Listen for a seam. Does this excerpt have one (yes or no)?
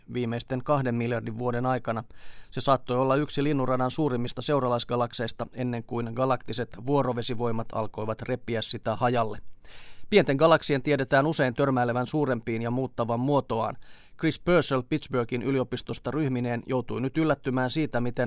no